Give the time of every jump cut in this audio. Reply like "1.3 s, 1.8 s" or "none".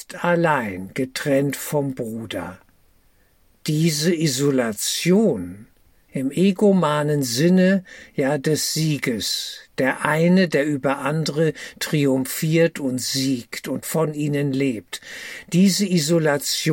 6.1 s